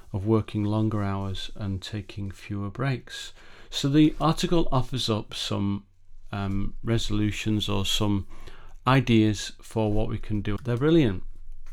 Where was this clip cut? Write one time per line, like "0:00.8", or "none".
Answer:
0:10.6